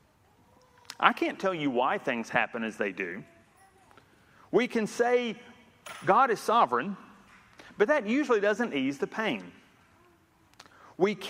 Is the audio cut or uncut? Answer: uncut